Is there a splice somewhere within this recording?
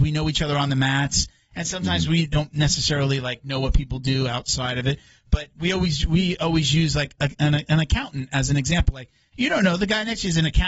no; 0 cuts

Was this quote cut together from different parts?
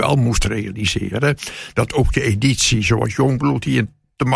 no; 0 cuts

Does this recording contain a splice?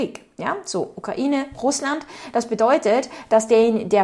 no; 0 cuts

